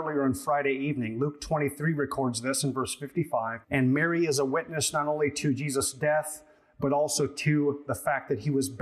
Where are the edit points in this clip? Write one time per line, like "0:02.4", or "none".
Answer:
0:03.6